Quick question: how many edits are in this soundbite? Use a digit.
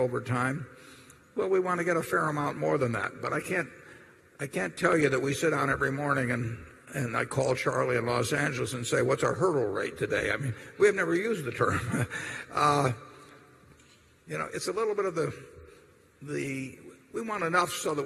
0